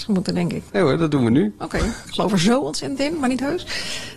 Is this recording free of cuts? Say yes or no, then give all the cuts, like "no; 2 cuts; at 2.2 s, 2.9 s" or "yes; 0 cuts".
no; 1 cut; at 2.0 s